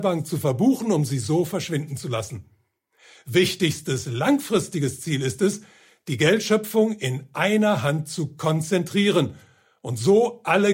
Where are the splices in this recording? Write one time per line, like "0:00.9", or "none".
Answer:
none